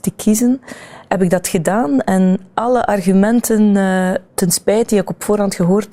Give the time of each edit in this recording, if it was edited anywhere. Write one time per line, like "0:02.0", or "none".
0:04.3